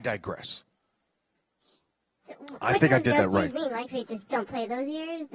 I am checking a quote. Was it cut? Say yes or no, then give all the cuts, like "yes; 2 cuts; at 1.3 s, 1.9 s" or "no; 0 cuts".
no; 0 cuts